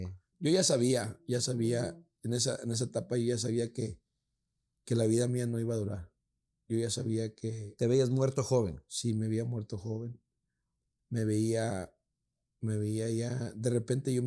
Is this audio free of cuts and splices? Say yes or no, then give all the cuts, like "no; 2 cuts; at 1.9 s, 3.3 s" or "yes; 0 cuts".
yes; 0 cuts